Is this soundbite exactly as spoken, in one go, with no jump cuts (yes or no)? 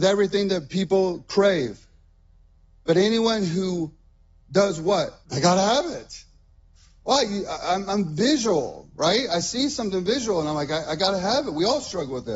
no